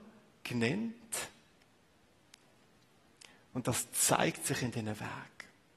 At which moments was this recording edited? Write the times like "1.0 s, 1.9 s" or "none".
none